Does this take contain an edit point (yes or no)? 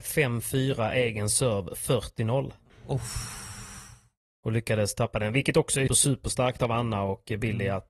yes